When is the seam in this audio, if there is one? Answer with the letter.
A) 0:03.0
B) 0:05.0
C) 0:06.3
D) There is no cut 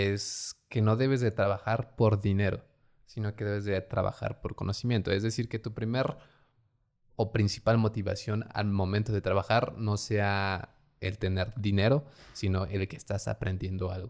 D